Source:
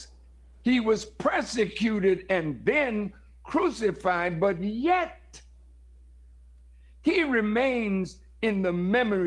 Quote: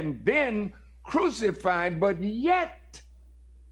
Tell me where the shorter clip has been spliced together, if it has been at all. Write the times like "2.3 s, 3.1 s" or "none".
none

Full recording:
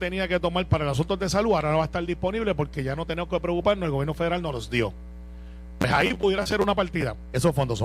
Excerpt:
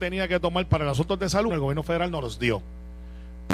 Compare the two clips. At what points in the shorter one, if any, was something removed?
1.5 s

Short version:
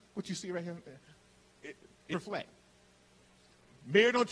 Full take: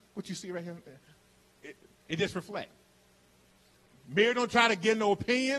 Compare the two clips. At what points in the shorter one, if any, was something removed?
2.1 s

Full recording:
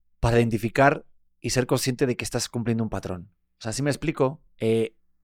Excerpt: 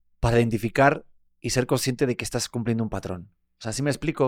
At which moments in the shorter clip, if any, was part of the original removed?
none

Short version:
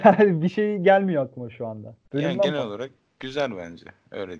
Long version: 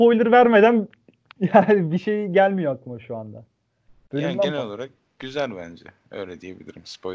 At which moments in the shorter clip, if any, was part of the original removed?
2.0 s

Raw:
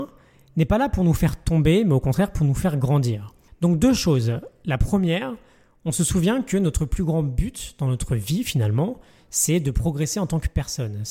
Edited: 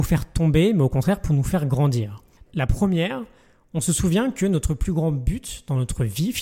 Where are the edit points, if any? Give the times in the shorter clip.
2.5 s

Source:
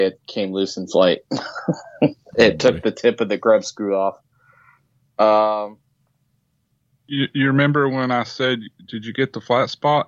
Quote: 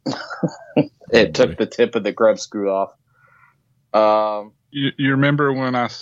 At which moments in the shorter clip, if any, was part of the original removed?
4.6 s

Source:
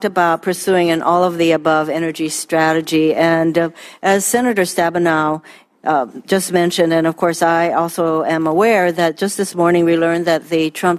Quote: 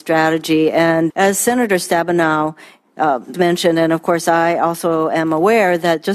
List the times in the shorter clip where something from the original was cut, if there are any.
1.1 s, 3.3 s

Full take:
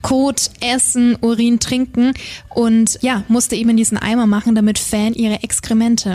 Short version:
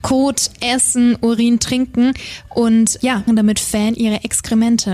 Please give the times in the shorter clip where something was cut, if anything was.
3.3 s

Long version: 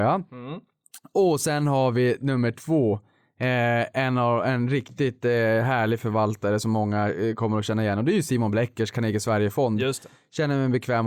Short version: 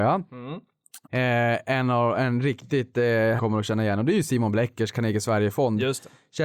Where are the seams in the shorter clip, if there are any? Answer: 1.0 s, 3.4 s

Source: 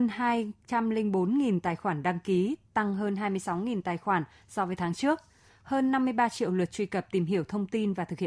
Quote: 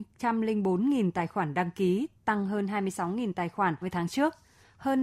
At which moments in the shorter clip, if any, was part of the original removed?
3.8 s

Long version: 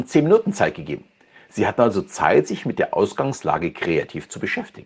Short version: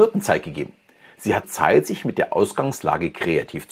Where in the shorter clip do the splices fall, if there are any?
1.4 s

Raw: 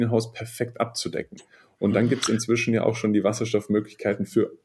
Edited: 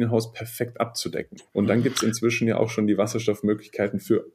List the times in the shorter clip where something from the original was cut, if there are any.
1.5 s

